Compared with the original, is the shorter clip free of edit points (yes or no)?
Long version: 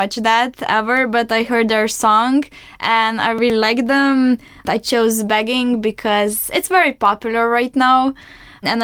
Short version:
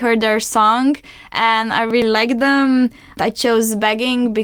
yes